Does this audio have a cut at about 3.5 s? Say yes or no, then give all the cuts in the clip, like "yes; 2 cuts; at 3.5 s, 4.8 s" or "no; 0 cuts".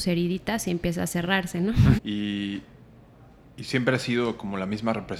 no; 1 cut; at 2.0 s